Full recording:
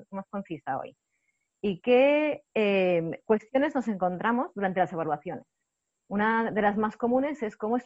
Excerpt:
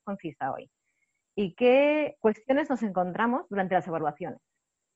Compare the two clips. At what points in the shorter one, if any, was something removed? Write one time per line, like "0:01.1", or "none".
0:02.2